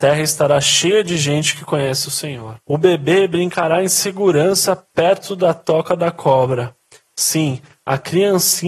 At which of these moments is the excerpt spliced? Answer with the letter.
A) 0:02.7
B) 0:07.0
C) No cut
A